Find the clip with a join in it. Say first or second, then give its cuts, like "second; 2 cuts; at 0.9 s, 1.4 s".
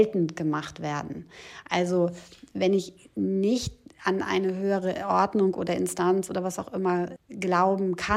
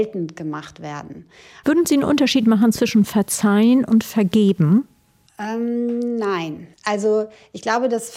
second; 2 cuts; at 1.6 s, 6.7 s